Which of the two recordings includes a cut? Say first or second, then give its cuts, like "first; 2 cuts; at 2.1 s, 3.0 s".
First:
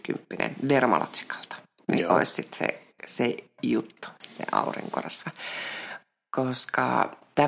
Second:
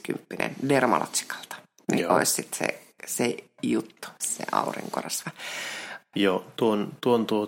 second; 1 cut; at 6.1 s